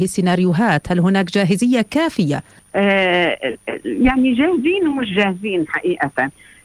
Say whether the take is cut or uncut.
cut